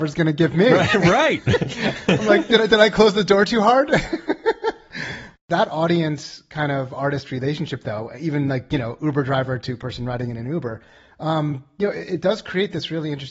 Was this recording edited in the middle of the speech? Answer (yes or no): no